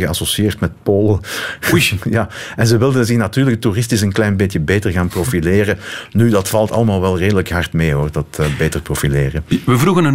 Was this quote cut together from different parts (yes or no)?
no